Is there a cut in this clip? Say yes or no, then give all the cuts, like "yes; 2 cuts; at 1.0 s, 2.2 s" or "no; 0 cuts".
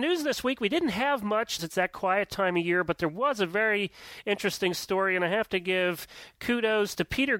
yes; 1 cut; at 1.6 s